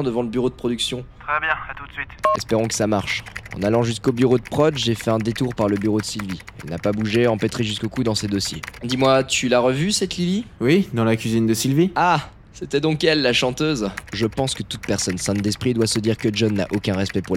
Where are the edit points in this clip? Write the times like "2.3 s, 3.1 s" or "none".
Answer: 8.8 s